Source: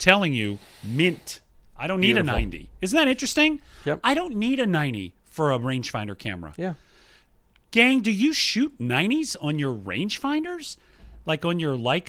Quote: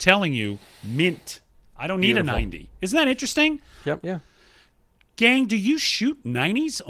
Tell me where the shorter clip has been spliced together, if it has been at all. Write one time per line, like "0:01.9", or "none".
0:04.0